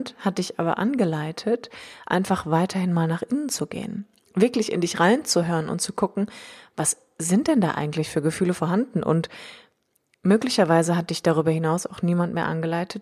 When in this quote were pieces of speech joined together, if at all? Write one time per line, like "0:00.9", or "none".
none